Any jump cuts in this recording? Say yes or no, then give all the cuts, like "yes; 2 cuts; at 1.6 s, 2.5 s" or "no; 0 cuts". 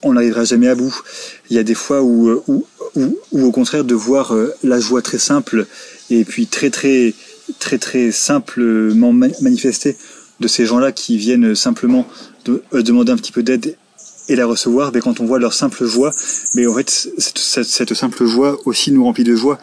no; 0 cuts